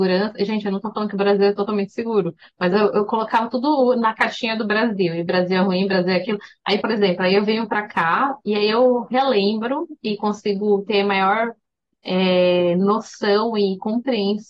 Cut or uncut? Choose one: cut